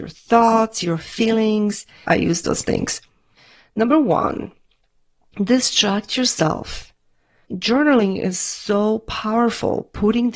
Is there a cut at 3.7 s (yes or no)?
no